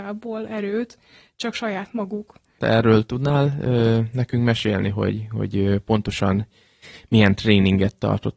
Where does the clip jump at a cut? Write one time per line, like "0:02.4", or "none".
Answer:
0:02.6